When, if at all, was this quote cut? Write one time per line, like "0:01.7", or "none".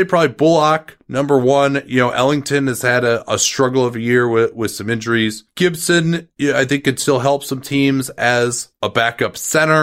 none